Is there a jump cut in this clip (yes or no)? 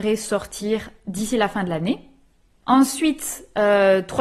no